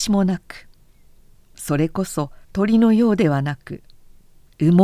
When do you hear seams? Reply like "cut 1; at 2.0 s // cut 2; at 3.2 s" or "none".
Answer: cut 1; at 2.4 s